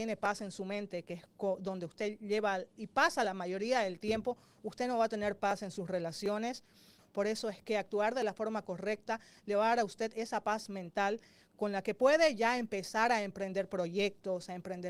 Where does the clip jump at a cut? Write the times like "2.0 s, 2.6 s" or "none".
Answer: 7.0 s